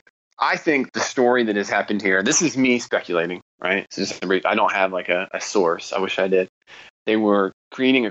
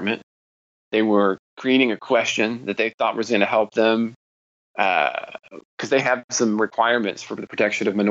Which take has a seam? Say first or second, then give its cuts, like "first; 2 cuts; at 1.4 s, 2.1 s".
first; 1 cut; at 6.9 s